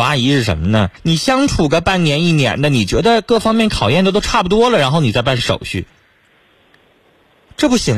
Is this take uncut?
no; 1 cut; at 1.0 s

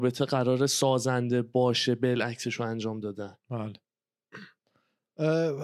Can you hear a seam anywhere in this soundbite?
yes; 1 cut; at 3.4 s

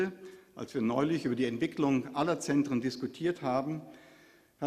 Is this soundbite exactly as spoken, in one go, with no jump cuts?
yes; 0 cuts

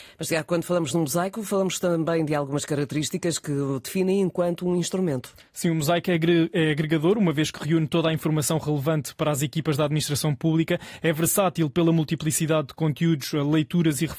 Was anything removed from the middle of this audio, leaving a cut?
no; 0 cuts

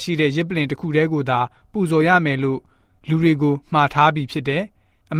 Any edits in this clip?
no; 0 cuts

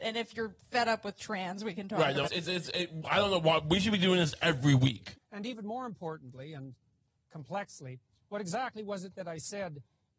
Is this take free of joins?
no; 2 cuts; at 2.2 s, 5.1 s

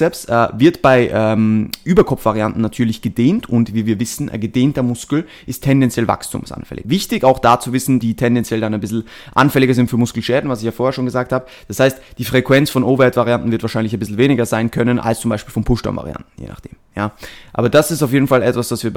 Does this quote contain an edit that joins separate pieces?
yes; 2 cuts; at 6.8 s, 8.0 s

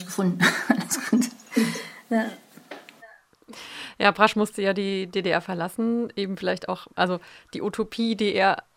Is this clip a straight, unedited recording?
yes; 0 cuts

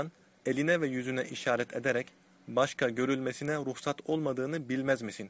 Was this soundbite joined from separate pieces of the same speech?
no; 0 cuts

